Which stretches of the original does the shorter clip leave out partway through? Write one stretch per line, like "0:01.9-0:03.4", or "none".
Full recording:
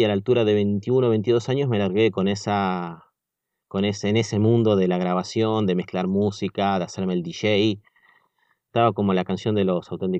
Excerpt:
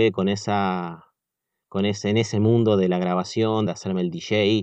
0:05.7-0:06.8